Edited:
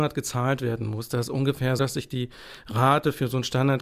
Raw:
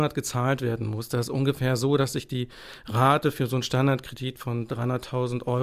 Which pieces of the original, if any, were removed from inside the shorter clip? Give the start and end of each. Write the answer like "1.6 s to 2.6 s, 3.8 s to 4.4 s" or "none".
1.8 s to 2.0 s

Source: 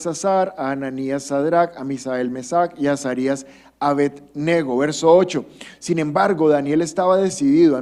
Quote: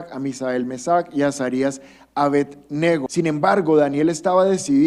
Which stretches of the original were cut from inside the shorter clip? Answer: 4.7 s to 5.8 s

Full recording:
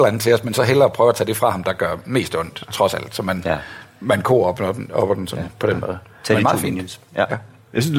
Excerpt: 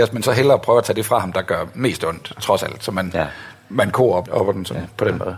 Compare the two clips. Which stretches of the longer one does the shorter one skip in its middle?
4.6 s to 4.9 s

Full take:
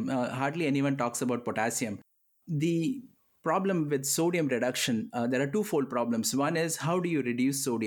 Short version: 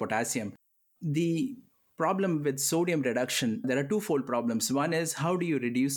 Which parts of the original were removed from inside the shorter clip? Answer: 5.1 s to 5.3 s

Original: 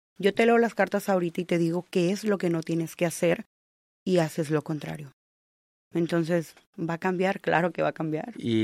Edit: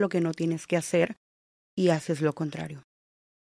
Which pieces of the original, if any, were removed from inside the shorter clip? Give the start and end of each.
none

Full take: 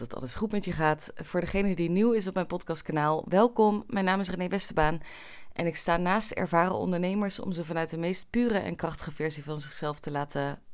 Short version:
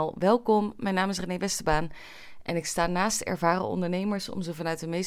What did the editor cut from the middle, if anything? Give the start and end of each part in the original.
none

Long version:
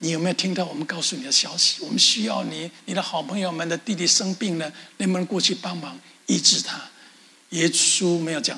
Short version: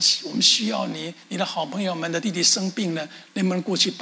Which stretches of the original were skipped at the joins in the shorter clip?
3.8 s to 3.9 s

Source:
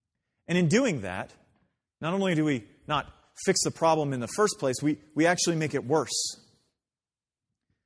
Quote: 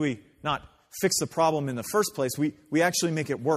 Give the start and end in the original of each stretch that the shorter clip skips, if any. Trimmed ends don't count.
none

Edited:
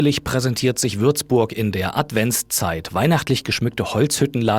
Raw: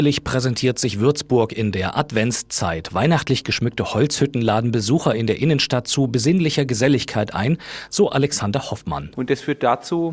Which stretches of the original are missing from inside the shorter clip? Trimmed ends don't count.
none

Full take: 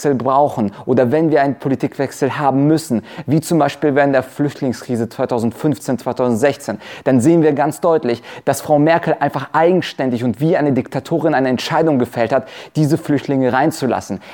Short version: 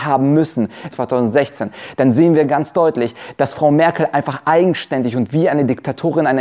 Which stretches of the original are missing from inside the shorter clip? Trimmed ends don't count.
3.2 s to 6.0 s

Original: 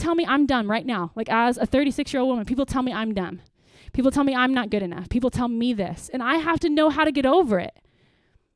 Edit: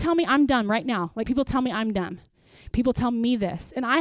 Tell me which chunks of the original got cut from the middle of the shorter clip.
1.2 s to 2.5 s, 3.9 s to 5.1 s

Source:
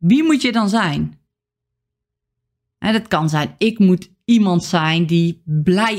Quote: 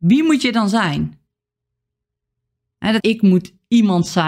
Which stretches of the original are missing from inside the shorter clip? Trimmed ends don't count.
3.0 s to 3.6 s

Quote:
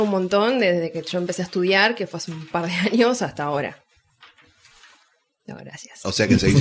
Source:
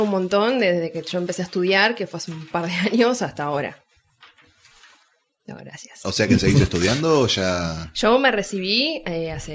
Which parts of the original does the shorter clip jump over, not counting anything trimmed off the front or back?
none

